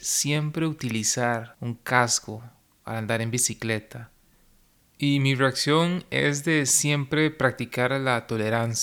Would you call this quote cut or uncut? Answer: uncut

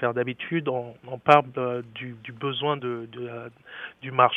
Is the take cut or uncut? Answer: uncut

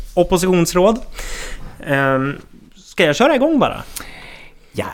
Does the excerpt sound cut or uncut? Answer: uncut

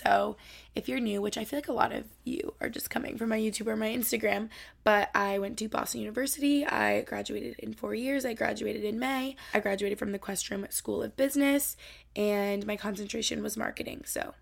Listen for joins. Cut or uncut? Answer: uncut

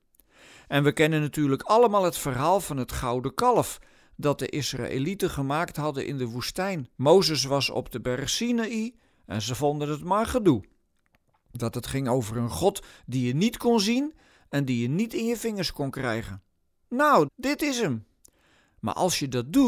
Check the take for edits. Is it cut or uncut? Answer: cut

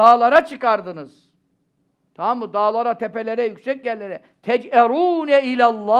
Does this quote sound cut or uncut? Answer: uncut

